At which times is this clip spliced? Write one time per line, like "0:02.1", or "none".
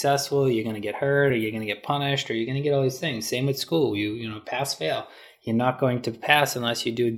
none